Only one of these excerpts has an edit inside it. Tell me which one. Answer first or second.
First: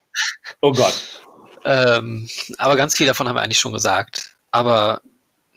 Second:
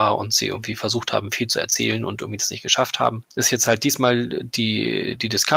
first